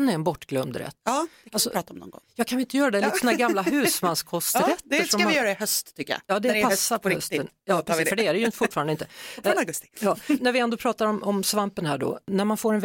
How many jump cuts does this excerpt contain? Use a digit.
1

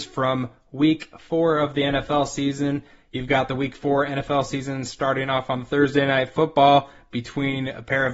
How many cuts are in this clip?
0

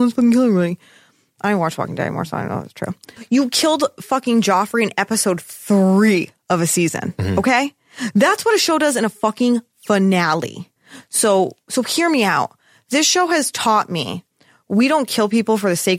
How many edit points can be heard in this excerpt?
1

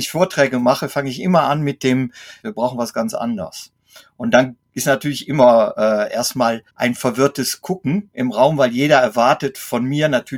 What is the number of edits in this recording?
2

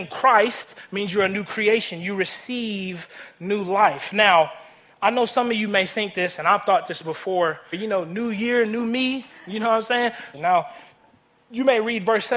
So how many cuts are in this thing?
2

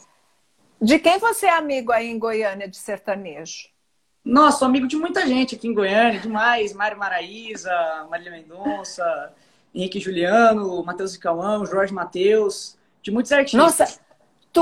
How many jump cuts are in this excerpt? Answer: 0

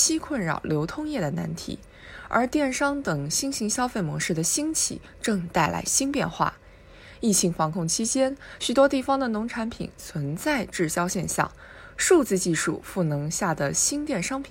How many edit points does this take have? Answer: 1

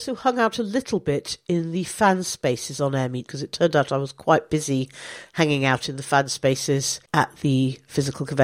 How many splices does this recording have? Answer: 2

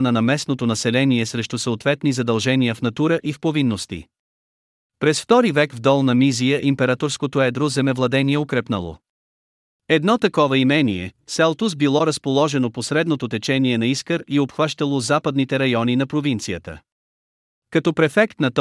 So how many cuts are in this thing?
0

